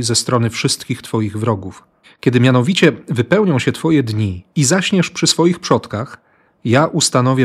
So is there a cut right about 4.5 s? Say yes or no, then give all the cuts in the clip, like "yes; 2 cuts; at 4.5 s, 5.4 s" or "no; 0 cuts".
yes; 2 cuts; at 2.0 s, 4.5 s